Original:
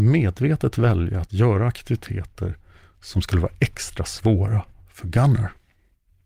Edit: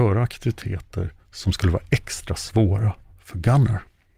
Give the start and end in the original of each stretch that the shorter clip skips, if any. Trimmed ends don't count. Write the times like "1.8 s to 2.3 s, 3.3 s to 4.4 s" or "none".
2.6 s to 2.9 s